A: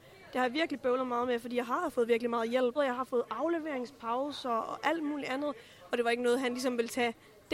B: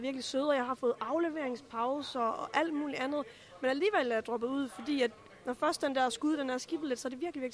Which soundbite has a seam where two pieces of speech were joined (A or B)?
A